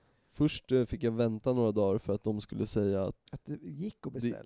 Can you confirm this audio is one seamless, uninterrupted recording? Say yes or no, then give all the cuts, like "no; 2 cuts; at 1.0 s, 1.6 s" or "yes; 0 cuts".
no; 1 cut; at 3.3 s